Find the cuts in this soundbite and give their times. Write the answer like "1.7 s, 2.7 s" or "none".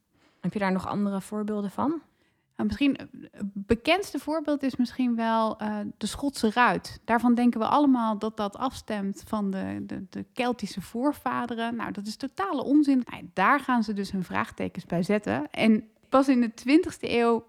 13.0 s